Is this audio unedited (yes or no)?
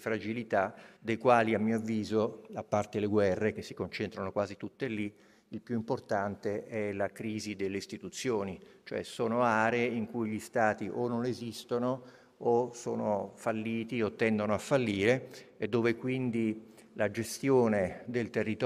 no